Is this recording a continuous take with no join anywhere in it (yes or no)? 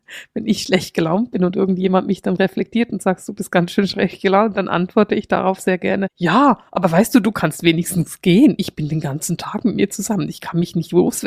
yes